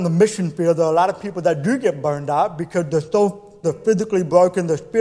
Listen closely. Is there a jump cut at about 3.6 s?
yes; 1 cut; at 3.6 s

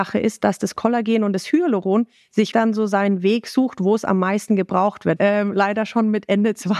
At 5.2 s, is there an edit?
yes; 2 cuts; at 2.5 s, 5.2 s

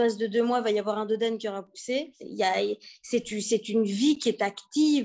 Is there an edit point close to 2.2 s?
yes; 1 cut; at 2.2 s

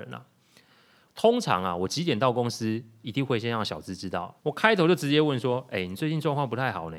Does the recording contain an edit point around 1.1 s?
yes; 2 cuts; at 1.1 s, 4.4 s

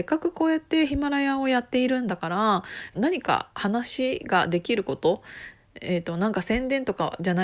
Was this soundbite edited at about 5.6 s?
no; 1 cut; at 2.9 s

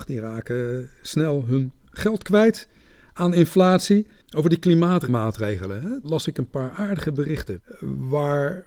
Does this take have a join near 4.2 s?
yes; 1 cut; at 4.2 s

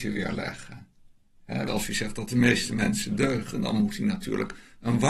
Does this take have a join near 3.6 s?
no; 1 cut; at 1.7 s

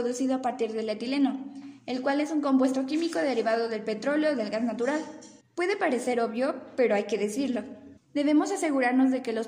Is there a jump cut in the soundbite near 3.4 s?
no; 2 cuts; at 5.4 s, 8.0 s

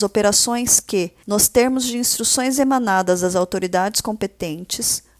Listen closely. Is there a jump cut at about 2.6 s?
no; 1 cut; at 1.2 s

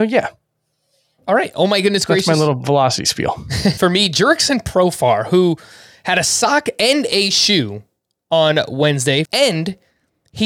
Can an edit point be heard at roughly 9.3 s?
yes; 2 cuts; at 3.8 s, 9.3 s

